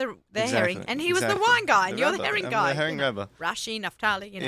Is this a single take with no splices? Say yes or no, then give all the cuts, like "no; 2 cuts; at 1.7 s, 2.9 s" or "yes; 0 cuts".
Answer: yes; 0 cuts